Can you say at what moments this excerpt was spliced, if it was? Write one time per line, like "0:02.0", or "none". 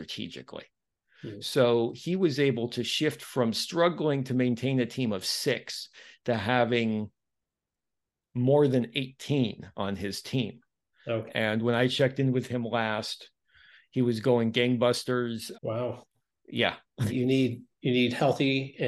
0:11.3
0:15.5
0:17.1